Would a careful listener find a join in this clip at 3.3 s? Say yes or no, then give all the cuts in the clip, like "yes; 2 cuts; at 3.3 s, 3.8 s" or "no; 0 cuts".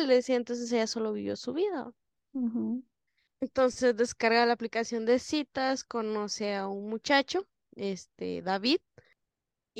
yes; 1 cut; at 3.3 s